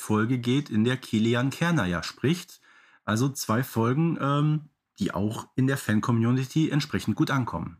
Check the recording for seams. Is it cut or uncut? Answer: uncut